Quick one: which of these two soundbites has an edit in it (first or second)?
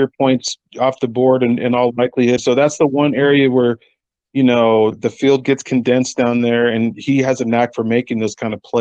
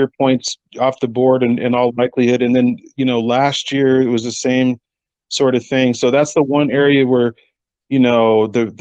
first